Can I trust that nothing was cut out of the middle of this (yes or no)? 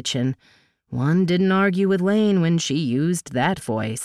yes